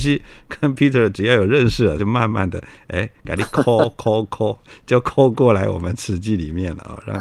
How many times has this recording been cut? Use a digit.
0